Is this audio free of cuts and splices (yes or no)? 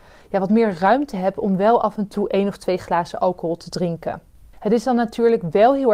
no